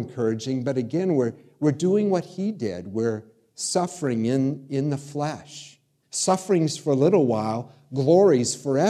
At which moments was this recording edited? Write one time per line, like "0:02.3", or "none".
0:06.0